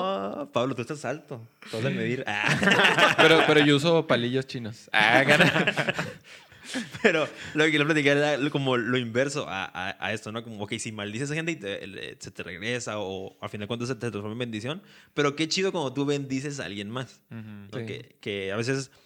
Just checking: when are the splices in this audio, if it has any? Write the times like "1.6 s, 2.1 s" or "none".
17.7 s